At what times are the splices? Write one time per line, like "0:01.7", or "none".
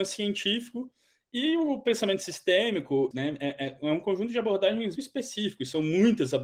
0:03.1
0:05.0